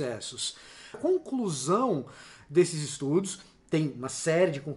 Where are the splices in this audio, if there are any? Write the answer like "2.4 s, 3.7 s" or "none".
0.9 s